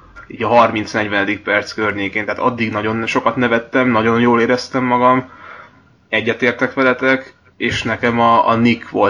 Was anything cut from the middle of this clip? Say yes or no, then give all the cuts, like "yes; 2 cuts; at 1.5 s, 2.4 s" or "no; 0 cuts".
no; 0 cuts